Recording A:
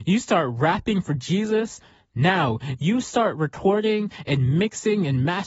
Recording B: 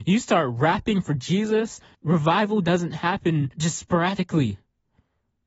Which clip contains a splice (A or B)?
B